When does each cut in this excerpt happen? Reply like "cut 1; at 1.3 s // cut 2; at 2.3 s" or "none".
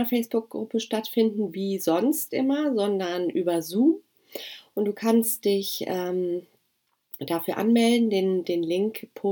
none